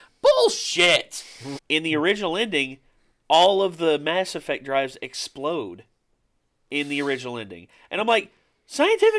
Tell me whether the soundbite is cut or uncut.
cut